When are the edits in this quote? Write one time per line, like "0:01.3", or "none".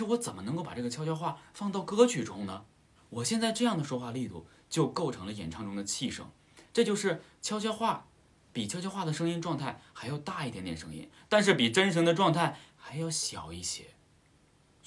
0:03.0